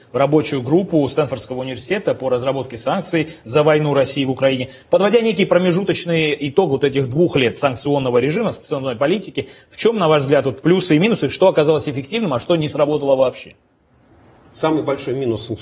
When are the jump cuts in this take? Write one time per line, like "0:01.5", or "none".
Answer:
none